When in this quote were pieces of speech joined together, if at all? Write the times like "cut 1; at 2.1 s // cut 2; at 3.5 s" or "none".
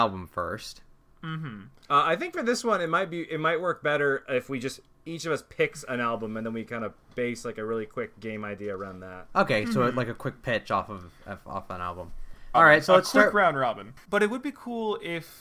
cut 1; at 12.5 s // cut 2; at 14.0 s